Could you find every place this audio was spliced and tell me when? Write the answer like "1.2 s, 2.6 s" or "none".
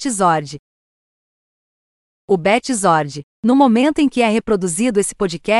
none